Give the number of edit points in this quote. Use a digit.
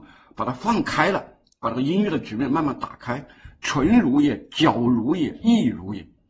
0